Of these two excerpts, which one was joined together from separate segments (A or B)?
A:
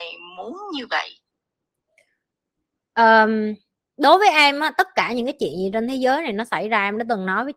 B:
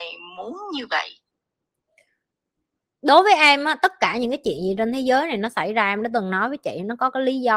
B